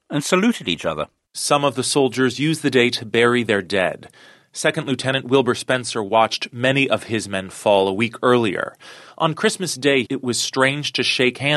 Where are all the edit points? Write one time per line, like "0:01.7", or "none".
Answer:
0:10.1